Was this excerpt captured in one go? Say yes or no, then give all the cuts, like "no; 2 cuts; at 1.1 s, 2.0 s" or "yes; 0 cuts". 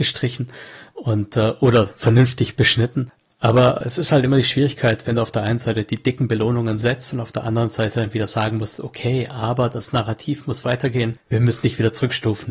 yes; 0 cuts